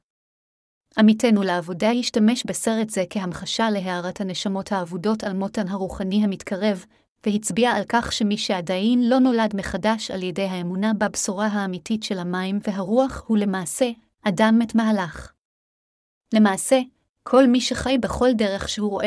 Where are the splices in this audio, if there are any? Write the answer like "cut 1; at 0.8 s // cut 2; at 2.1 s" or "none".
none